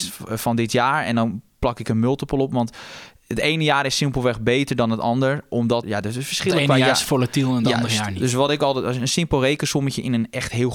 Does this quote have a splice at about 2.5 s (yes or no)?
no